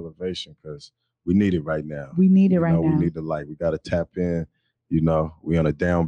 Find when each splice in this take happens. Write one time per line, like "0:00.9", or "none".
none